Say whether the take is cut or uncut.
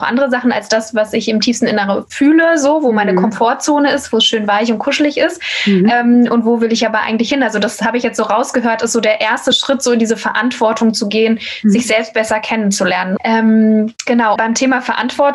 cut